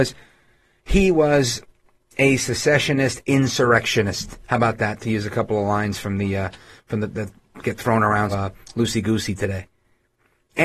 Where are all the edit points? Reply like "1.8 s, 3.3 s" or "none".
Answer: 8.3 s